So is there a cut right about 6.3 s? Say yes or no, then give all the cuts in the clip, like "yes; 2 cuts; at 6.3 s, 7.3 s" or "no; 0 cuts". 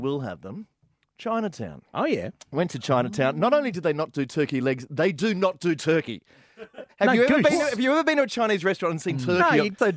no; 0 cuts